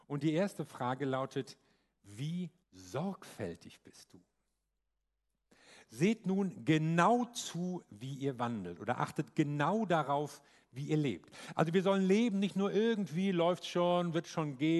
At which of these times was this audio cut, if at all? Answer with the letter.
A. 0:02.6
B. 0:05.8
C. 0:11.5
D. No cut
A